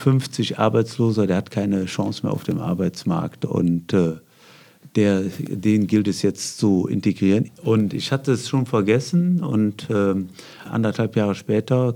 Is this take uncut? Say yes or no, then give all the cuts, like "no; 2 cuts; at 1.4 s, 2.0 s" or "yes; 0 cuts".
no; 2 cuts; at 7.5 s, 10.7 s